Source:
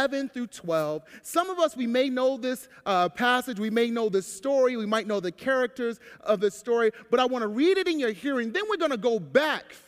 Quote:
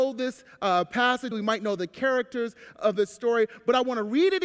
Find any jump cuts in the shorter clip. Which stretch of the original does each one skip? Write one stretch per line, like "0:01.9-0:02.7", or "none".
0:03.6-0:04.8